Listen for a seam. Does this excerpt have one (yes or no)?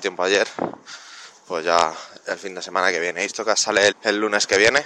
yes